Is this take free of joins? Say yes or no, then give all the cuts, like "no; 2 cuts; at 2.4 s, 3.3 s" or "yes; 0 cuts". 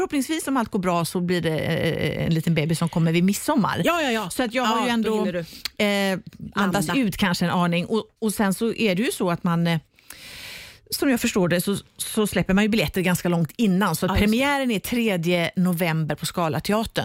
yes; 0 cuts